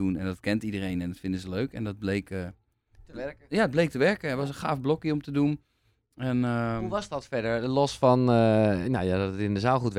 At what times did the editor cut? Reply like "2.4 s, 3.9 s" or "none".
none